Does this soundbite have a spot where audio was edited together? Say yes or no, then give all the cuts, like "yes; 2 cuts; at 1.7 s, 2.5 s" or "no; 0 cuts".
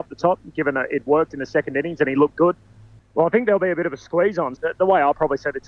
yes; 2 cuts; at 3.0 s, 4.6 s